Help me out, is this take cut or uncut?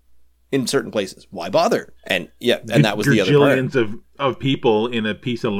cut